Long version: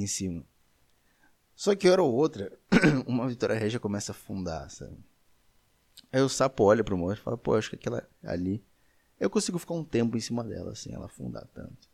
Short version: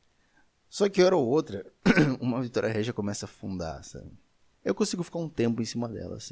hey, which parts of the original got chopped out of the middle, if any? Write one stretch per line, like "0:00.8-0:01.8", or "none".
0:05.4-0:09.1